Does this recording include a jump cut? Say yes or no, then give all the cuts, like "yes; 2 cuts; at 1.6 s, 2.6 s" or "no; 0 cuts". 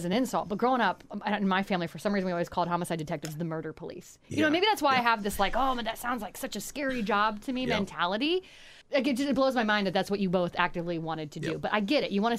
no; 0 cuts